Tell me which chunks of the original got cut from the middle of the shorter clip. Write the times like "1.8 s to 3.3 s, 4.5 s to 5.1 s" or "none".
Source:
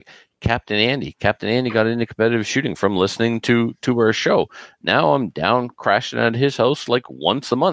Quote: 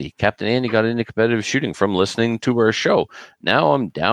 3.4 s to 3.8 s

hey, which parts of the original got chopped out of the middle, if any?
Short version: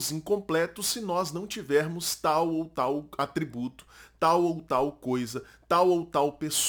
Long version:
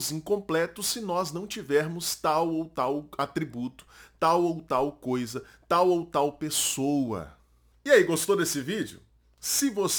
none

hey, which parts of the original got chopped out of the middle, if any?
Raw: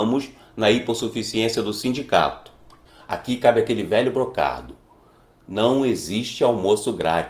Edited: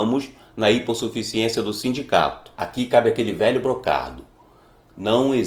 2.5 s to 3.1 s

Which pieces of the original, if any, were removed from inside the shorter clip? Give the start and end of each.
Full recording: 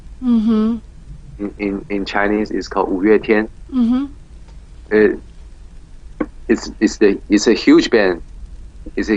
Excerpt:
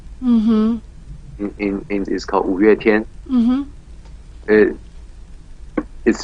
2.1 s to 2.5 s

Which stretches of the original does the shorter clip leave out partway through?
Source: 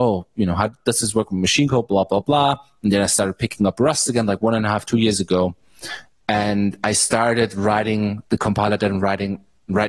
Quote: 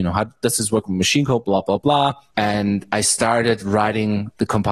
2.7 s to 6.2 s

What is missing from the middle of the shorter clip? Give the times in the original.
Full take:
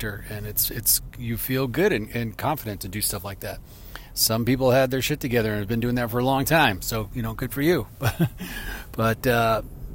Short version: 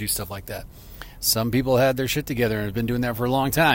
none

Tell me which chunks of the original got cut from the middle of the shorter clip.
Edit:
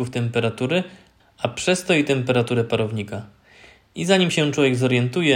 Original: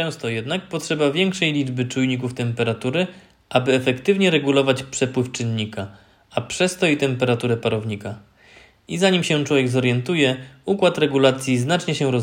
3.4 s to 6.1 s

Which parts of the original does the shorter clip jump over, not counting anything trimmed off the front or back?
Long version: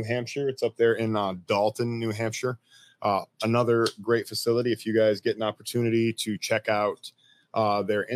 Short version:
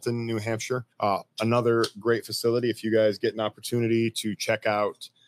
2.6 s to 2.9 s

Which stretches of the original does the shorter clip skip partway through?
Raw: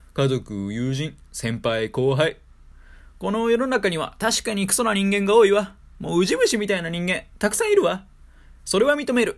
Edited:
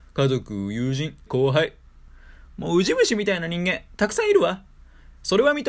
1.3 s to 1.9 s, 3.1 s to 5.9 s

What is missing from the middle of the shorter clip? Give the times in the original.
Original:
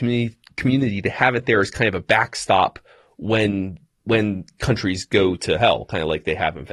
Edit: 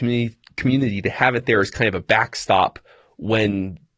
none

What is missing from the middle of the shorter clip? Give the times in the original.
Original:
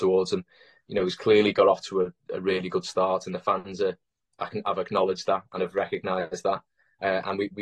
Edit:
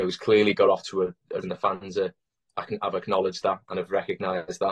2.4 s to 3.2 s

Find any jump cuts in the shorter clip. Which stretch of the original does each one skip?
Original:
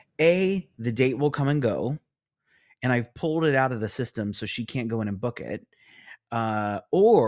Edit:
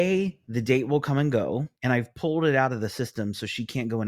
2.1 s to 2.7 s

